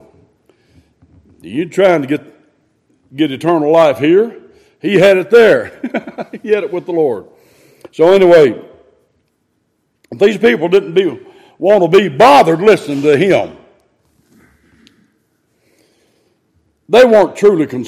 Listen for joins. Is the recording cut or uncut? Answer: uncut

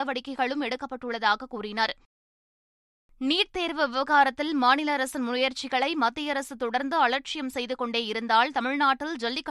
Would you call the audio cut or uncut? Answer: uncut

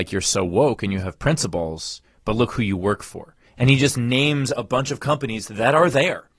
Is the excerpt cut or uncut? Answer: uncut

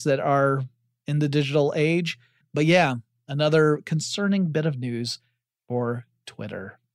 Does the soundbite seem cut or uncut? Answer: cut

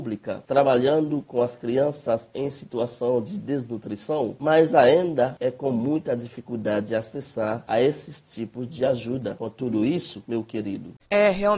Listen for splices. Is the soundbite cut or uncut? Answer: uncut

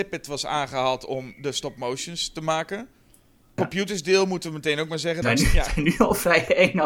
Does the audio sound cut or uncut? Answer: cut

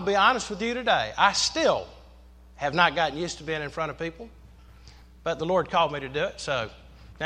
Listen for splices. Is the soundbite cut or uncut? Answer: uncut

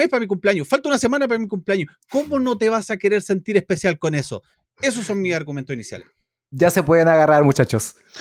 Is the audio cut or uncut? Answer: uncut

